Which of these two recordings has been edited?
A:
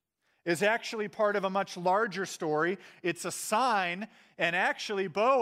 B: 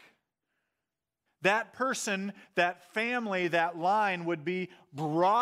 B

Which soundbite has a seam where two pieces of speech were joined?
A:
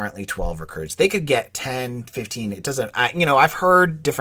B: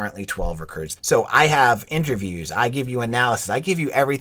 B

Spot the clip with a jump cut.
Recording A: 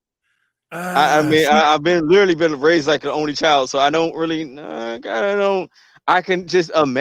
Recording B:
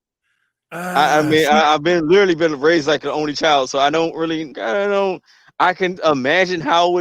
B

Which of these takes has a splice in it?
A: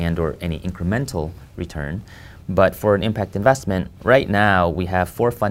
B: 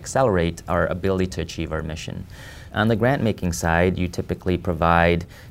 B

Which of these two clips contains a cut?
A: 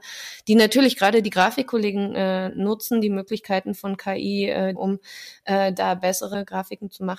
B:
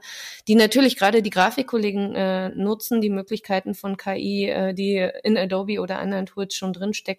A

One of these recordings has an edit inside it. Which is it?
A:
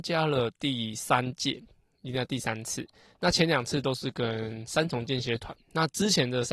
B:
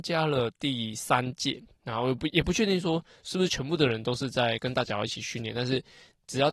B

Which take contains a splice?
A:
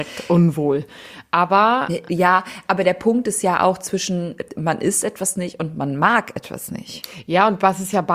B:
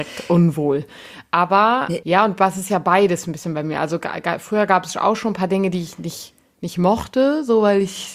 B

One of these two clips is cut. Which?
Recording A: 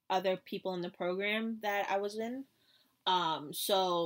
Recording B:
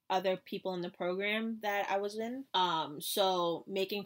B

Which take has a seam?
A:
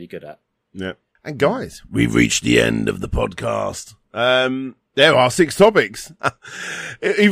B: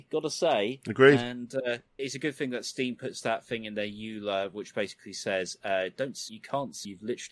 A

